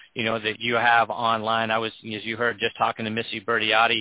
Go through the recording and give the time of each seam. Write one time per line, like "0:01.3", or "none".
none